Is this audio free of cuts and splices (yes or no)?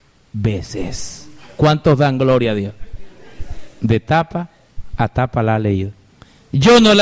yes